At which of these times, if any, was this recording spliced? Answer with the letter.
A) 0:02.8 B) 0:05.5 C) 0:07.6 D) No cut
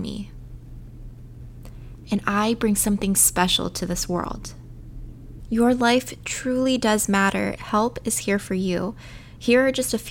C